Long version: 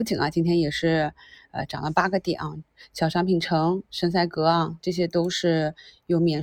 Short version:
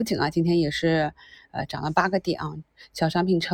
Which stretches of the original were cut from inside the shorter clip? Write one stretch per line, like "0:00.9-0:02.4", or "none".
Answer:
none